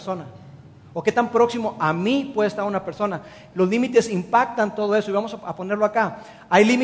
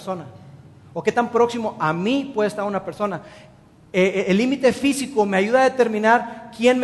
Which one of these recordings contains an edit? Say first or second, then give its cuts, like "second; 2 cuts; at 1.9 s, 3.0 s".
first; 1 cut; at 3.5 s